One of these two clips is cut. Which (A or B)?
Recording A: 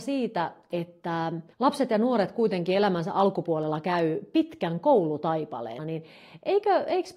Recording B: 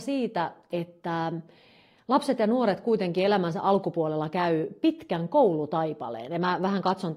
A